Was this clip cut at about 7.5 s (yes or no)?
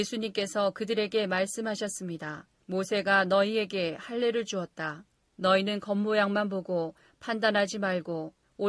no